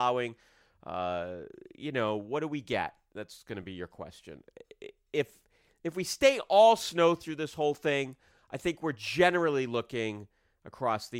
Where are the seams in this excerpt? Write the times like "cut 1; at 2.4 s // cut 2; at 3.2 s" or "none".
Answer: none